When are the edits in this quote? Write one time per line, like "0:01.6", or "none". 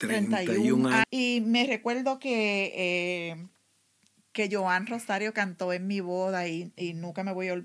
0:01.0